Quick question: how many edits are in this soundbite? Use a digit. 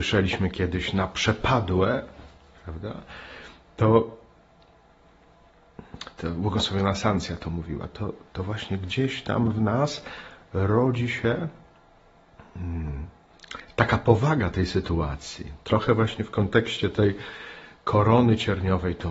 0